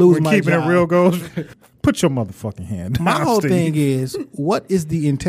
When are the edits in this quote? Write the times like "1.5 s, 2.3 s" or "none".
1.5 s